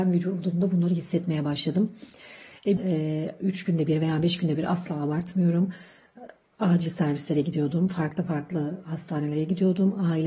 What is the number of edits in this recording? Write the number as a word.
one